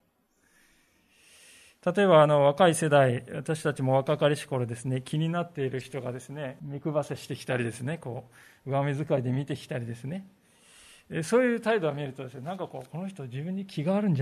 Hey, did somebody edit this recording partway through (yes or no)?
yes